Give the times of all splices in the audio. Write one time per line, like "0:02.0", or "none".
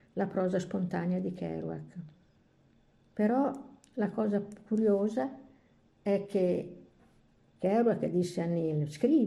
none